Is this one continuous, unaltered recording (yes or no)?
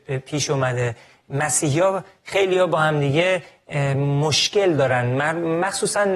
yes